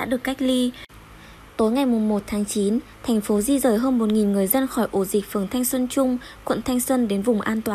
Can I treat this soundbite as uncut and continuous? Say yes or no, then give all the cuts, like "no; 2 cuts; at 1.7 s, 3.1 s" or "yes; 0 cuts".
yes; 0 cuts